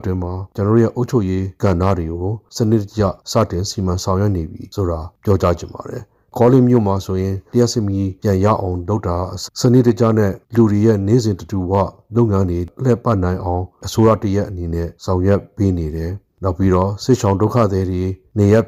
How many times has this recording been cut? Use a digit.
1